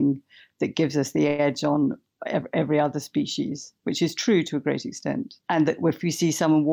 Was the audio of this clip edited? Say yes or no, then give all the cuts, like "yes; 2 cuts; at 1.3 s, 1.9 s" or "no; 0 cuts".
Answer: no; 0 cuts